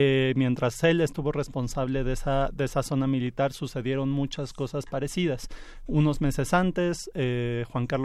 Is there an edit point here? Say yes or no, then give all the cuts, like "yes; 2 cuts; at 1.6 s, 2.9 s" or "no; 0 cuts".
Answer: no; 0 cuts